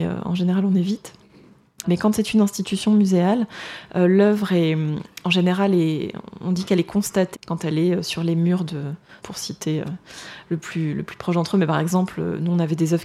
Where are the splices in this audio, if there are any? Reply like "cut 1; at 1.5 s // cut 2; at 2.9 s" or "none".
cut 1; at 1.8 s // cut 2; at 7.3 s // cut 3; at 9.2 s